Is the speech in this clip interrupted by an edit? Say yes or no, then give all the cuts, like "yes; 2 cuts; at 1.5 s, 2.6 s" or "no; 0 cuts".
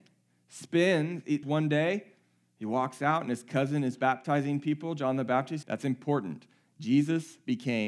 yes; 2 cuts; at 1.4 s, 5.6 s